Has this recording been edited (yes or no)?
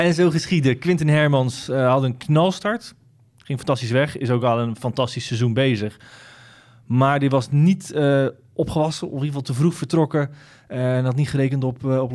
no